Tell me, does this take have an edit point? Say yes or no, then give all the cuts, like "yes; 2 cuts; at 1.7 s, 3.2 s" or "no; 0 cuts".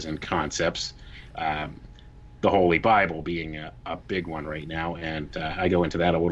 yes; 1 cut; at 1.3 s